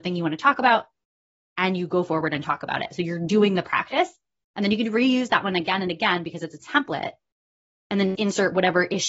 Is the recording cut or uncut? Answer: cut